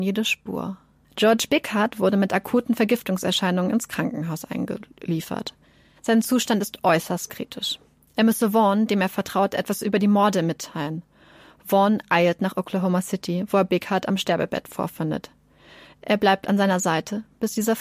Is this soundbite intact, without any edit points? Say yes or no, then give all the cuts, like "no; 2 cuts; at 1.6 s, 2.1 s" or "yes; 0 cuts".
no; 1 cut; at 1.0 s